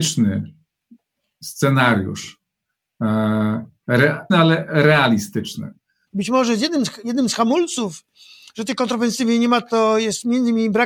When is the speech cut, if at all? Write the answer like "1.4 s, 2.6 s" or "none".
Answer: 4.3 s, 6.1 s